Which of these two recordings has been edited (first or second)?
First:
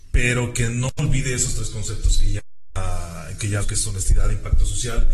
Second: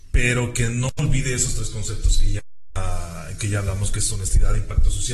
first